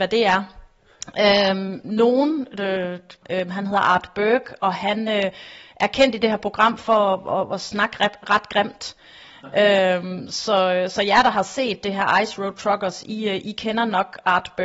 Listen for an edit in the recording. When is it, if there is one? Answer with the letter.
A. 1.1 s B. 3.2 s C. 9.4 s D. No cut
B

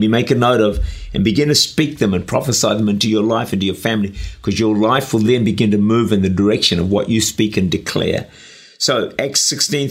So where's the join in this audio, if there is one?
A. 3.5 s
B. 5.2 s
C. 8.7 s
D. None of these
D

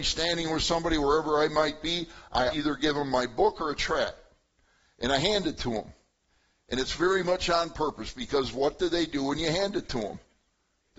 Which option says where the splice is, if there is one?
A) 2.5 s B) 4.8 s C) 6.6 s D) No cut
A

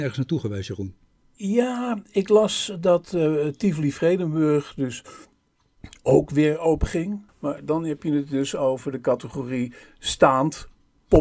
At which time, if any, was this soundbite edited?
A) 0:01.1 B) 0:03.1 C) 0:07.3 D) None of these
C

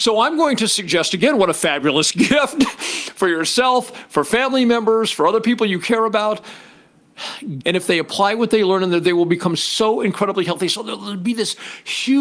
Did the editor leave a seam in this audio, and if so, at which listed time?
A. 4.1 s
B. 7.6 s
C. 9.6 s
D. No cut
B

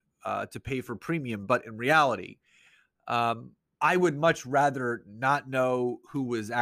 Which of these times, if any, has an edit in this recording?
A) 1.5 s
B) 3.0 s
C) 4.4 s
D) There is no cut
D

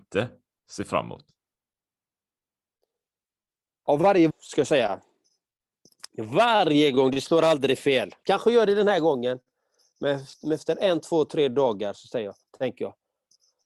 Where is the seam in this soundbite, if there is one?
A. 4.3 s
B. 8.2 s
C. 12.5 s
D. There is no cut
A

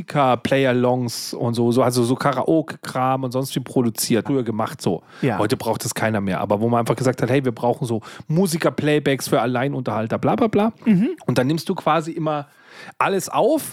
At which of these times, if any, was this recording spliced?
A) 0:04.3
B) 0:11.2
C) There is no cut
A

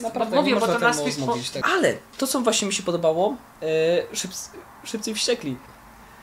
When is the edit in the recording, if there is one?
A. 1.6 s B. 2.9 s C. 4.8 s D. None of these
A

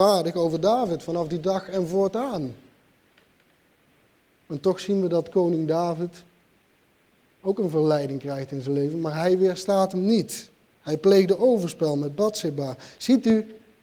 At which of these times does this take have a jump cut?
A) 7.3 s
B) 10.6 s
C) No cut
C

